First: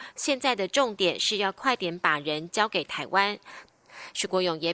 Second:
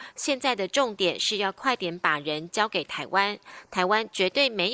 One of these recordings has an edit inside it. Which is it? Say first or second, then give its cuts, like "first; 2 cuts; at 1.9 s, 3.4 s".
first; 1 cut; at 3.7 s